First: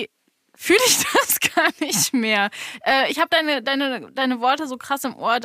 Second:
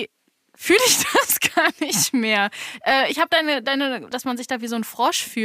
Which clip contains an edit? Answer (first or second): second